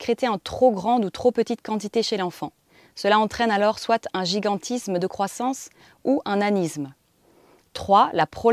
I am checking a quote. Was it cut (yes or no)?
no